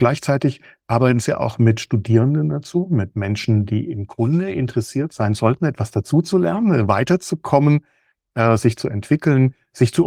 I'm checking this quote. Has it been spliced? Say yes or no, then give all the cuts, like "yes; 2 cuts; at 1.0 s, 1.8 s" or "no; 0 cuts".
no; 0 cuts